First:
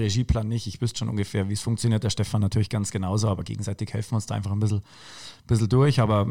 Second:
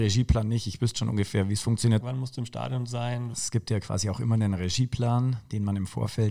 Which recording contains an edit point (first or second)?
second